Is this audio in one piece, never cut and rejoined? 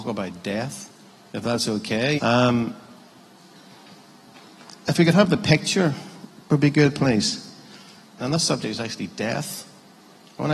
no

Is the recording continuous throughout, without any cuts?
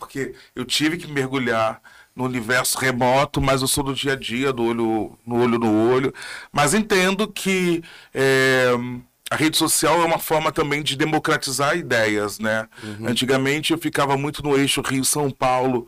yes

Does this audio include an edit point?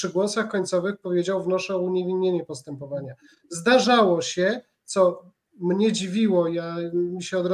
no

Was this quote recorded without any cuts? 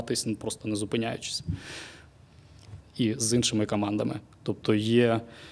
no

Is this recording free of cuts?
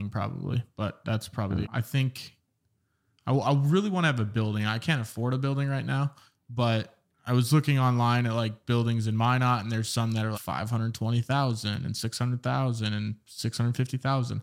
no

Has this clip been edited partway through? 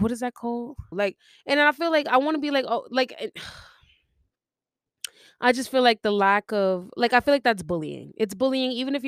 yes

